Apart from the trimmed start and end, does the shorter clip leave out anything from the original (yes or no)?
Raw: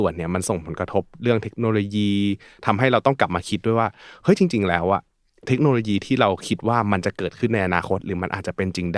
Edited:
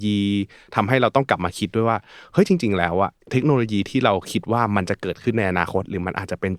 yes